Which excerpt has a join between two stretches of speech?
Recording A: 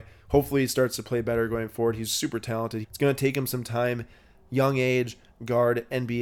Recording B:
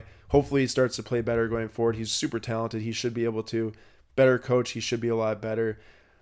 A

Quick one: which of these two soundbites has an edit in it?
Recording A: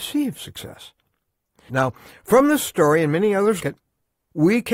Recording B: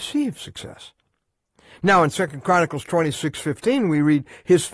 A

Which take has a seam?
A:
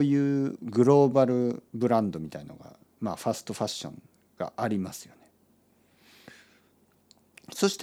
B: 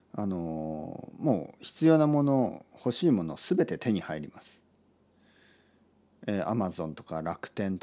A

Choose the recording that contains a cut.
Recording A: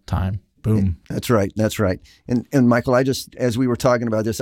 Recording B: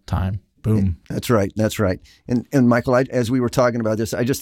B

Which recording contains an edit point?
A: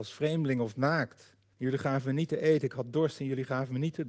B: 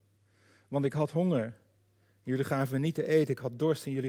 A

